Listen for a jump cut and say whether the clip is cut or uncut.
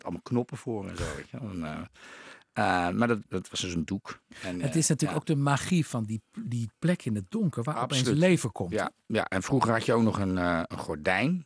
cut